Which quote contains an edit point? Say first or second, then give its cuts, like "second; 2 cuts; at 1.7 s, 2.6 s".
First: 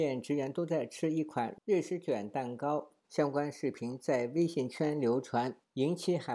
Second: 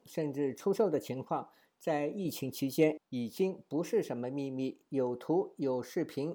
first; 1 cut; at 3.0 s